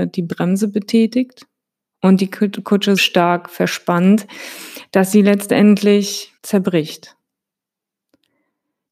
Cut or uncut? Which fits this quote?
cut